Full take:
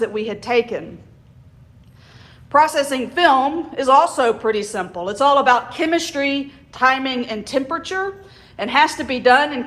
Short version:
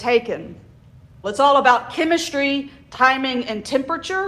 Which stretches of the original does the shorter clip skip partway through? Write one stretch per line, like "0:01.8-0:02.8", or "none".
0:01.7-0:05.0